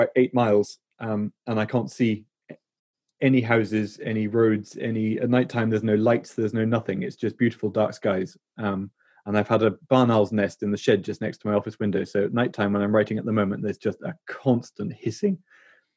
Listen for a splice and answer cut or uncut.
uncut